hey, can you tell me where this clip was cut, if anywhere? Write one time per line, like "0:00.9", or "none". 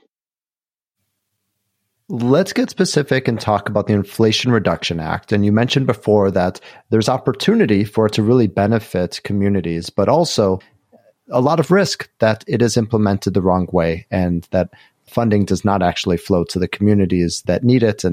0:02.0

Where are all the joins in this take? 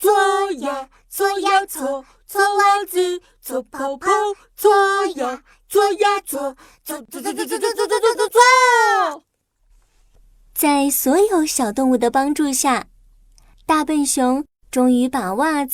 none

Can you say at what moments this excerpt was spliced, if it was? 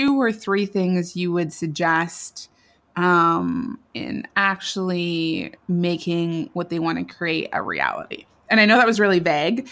0:03.9

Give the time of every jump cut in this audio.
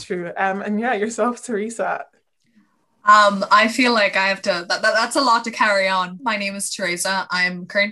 0:06.2

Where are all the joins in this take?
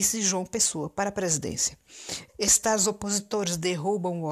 0:02.3

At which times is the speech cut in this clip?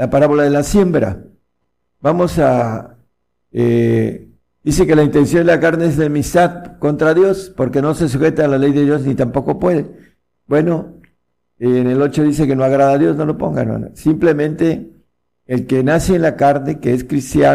0:03.4

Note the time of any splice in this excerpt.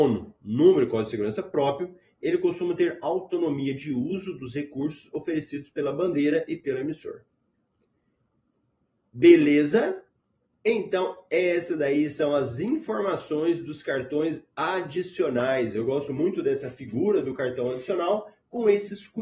none

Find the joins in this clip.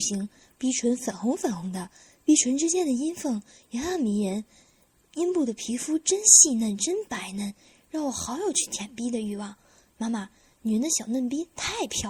none

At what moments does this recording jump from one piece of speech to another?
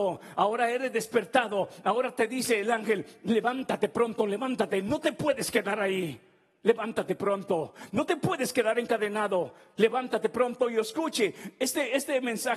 none

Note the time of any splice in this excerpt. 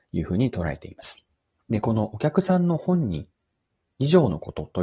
0:01.6

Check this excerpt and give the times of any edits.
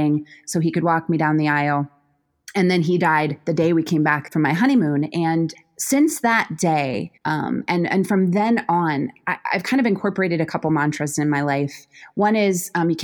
0:07.2

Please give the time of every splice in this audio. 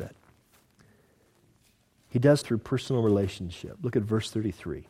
0:02.4

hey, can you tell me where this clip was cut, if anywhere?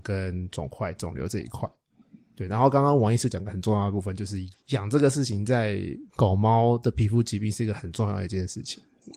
0:04.5
0:06.1

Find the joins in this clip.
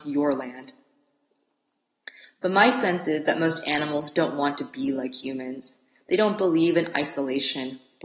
none

